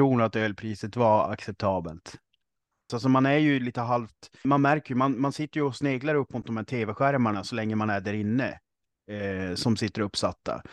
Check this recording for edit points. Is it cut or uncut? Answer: cut